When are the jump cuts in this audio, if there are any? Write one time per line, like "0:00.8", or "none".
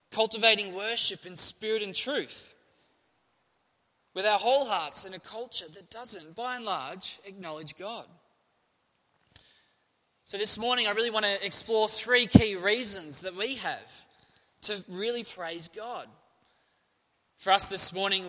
0:17.2

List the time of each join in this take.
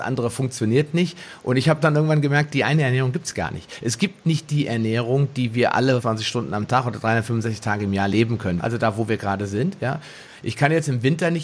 0:06.0
0:08.6
0:10.3

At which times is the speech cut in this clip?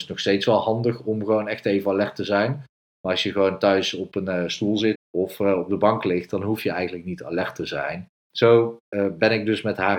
0:04.9
0:08.2

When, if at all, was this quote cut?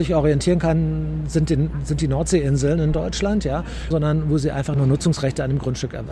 0:03.9

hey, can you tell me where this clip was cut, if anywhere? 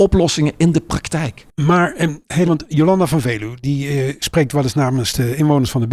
0:02.4

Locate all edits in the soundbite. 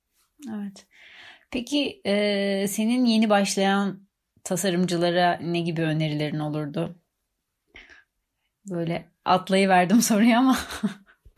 none

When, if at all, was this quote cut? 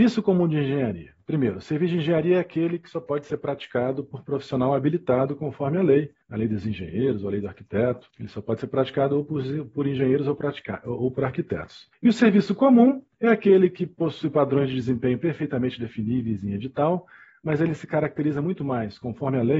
none

